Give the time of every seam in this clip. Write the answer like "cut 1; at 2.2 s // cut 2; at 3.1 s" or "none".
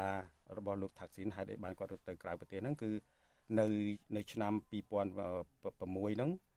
cut 1; at 4.0 s